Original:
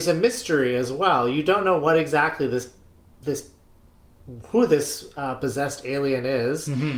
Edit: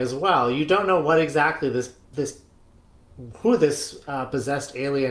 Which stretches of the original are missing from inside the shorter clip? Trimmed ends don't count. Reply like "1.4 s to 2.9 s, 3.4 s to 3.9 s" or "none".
2.8 s to 3.1 s